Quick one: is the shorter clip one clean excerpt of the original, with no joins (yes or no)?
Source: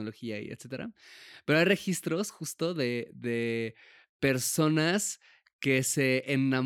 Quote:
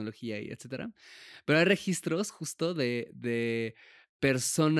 yes